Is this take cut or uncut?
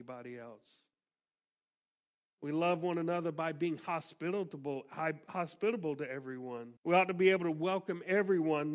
cut